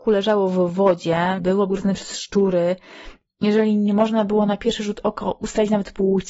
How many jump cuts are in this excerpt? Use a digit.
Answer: 1